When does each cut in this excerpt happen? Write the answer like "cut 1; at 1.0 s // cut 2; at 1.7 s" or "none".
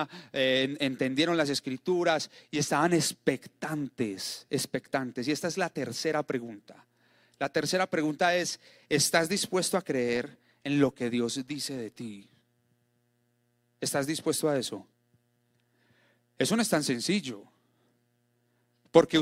none